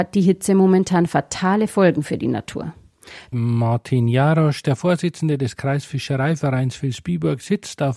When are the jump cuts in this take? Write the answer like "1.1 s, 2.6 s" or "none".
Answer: 3.3 s

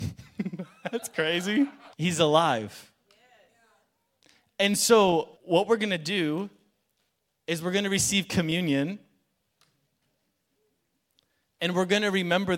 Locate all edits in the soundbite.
1.9 s, 5.4 s

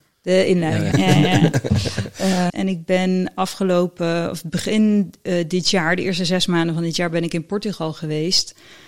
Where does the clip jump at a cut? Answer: 0.9 s, 2.5 s

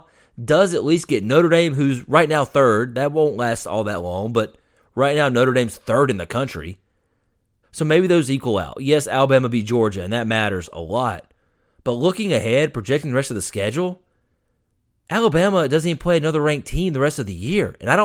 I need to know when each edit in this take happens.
7.6 s

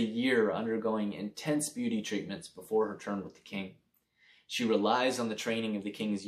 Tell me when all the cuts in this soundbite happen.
none

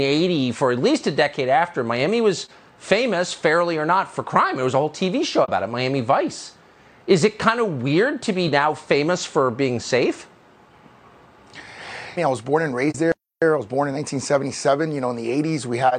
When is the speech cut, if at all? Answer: 12.2 s

